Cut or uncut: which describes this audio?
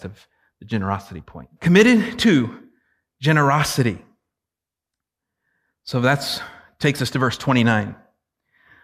cut